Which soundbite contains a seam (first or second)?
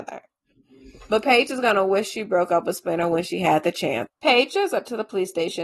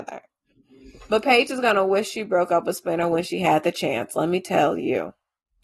first